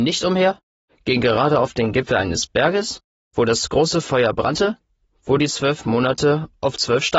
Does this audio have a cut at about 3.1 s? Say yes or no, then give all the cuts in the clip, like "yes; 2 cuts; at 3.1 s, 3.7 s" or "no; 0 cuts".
no; 0 cuts